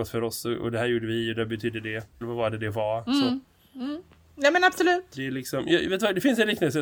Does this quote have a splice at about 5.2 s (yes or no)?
no